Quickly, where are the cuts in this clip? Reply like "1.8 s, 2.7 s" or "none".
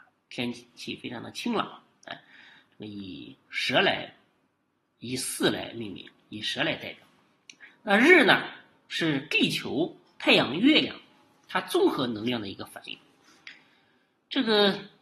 7.7 s